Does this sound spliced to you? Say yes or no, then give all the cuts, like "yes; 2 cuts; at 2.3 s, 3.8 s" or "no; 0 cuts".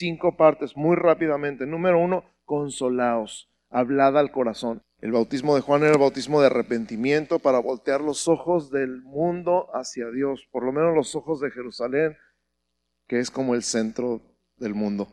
yes; 1 cut; at 4.8 s